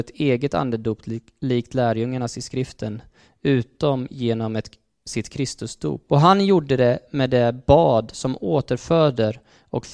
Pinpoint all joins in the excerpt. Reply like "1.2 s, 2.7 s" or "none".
6.1 s